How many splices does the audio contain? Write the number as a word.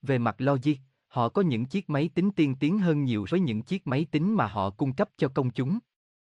one